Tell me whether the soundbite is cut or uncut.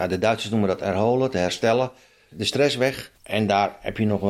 cut